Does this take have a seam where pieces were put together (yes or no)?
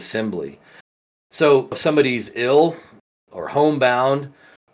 no